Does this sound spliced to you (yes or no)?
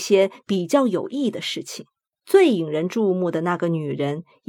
yes